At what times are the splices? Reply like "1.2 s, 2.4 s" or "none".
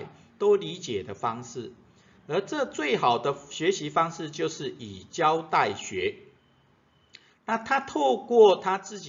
7.3 s